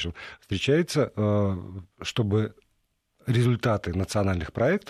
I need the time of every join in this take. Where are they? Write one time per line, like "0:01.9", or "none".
none